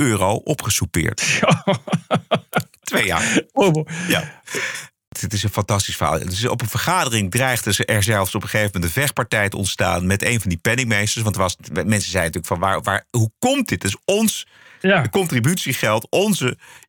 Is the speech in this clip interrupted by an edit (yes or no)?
no